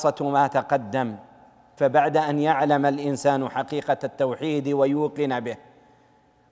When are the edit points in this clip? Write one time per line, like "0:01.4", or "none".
0:01.8